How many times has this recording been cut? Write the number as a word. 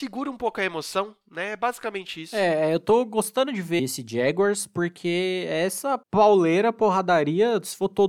one